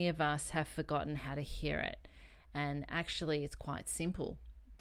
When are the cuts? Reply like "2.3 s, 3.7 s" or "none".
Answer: none